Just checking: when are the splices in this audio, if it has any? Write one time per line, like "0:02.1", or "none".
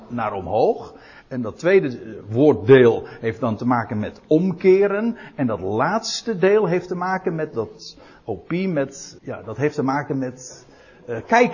0:09.2